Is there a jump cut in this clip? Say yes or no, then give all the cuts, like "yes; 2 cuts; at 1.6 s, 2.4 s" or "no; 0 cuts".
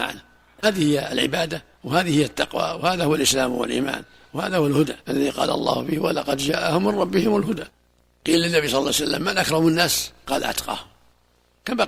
yes; 2 cuts; at 1.7 s, 5.0 s